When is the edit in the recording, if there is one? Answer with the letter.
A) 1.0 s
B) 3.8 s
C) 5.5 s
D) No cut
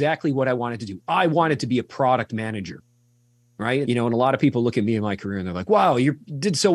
B